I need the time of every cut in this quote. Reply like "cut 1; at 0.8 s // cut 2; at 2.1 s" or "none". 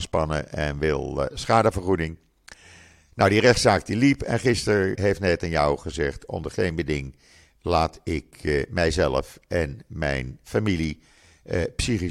cut 1; at 4.9 s